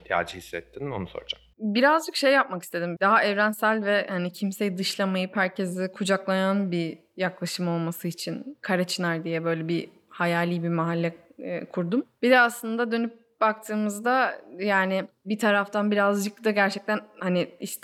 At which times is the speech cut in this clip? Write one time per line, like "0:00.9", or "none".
0:01.5
0:03.0